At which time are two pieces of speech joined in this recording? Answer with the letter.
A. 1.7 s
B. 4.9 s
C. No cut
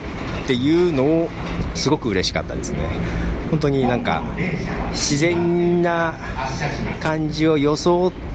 A